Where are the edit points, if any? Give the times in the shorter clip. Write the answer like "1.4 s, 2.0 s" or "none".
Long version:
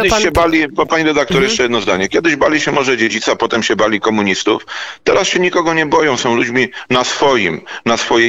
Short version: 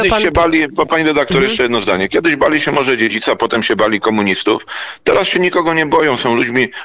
none

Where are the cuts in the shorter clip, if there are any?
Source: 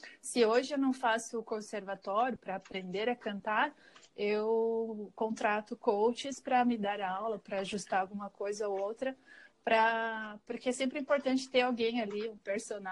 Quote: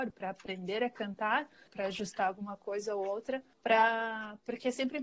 1.7 s, 3.5 s

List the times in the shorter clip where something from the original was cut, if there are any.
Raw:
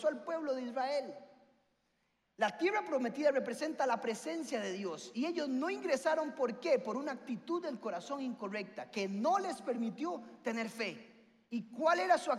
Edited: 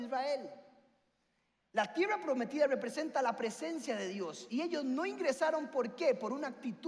none

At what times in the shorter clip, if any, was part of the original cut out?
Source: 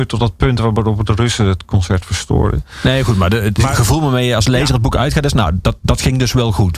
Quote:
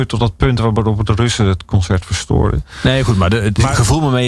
none

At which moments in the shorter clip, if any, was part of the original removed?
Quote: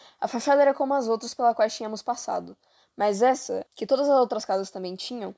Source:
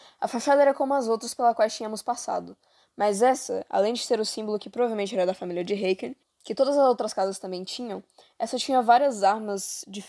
3.7 s

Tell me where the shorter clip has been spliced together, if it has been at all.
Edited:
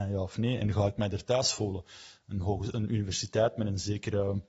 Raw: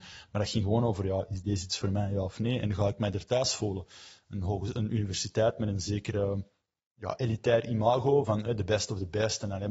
none

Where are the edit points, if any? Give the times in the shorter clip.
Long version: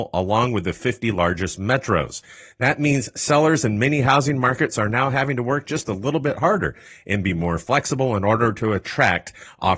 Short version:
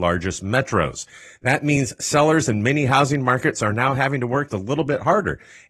4.5 s

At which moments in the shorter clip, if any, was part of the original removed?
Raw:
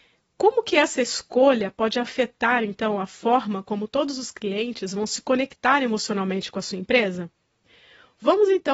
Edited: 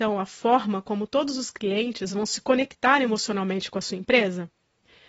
none

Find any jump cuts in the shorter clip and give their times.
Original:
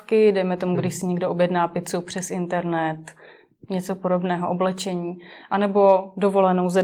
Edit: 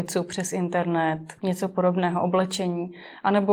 1.4 s

